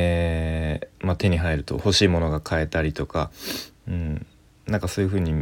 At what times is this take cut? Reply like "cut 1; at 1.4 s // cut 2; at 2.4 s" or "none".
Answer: cut 1; at 0.9 s